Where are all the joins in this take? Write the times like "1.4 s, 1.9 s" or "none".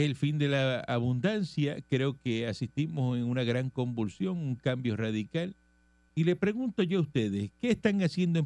6.1 s